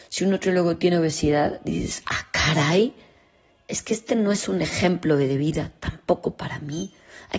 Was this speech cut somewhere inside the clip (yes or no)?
no